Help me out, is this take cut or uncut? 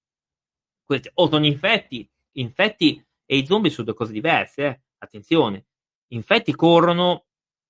uncut